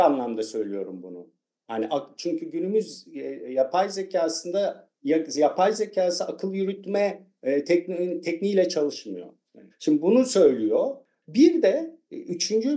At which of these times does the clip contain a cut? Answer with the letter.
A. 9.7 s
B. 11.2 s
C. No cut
A